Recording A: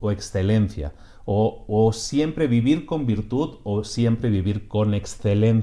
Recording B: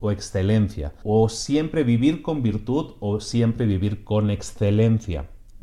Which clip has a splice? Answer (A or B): B